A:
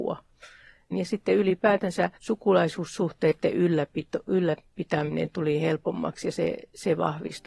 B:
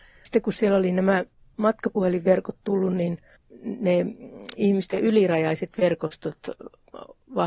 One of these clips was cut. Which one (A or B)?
A